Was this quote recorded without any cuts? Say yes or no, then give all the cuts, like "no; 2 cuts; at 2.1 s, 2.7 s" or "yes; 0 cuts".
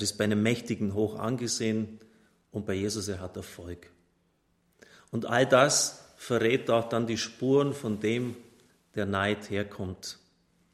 yes; 0 cuts